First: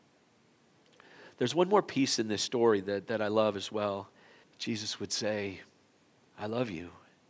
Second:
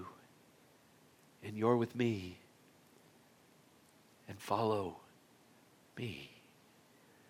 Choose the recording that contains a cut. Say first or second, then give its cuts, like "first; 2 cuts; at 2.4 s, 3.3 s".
first; 1 cut; at 4.4 s